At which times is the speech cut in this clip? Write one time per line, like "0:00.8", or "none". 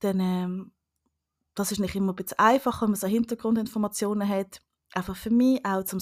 none